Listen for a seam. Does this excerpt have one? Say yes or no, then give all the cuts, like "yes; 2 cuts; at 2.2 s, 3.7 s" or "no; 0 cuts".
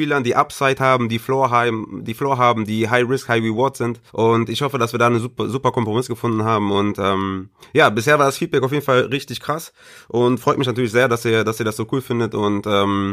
yes; 1 cut; at 4.1 s